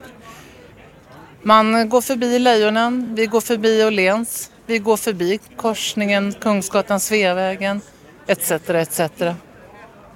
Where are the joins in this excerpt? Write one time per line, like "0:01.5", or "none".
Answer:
none

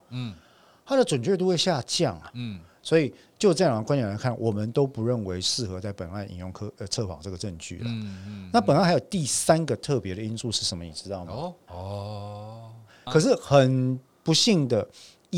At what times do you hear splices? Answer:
0:02.3
0:11.7
0:13.1

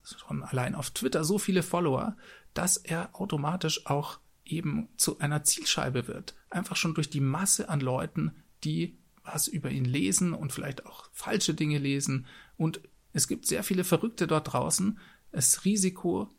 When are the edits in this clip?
none

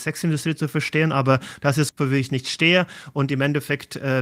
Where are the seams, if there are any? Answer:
0:01.9

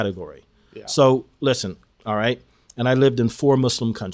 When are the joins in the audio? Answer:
0:01.9

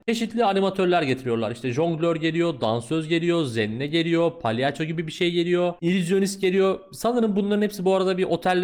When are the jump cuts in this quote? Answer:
none

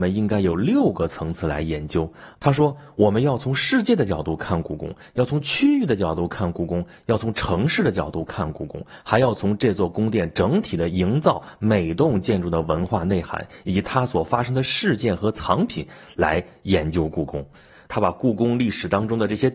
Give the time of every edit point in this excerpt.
0:17.9

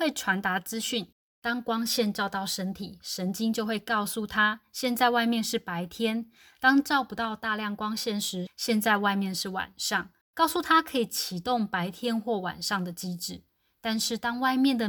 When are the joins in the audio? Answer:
0:08.5
0:10.2

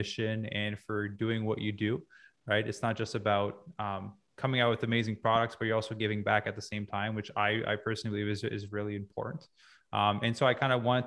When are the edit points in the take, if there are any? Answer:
none

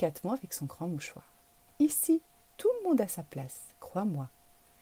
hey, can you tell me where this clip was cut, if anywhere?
0:01.7

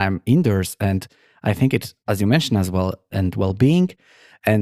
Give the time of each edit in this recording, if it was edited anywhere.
0:03.1

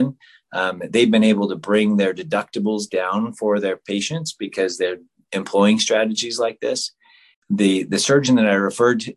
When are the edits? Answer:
0:07.3

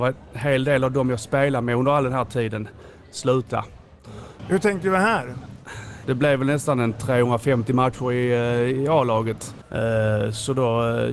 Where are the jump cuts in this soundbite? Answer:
0:04.4
0:06.0
0:09.6

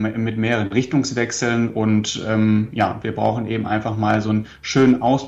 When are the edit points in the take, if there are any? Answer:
0:03.0

